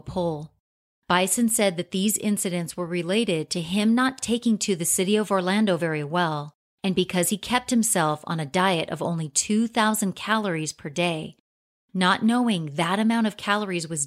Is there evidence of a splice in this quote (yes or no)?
no